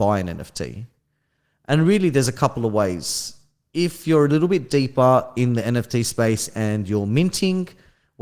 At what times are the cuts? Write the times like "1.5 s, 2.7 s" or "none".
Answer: none